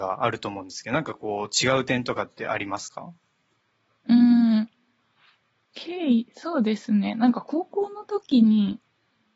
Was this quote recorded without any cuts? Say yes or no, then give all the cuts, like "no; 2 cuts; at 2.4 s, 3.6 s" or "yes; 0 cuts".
yes; 0 cuts